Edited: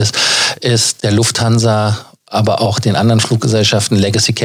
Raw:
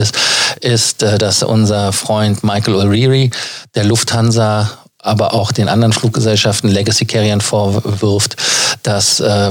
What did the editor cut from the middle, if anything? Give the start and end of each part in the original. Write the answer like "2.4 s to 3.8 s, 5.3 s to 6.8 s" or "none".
1.0 s to 3.7 s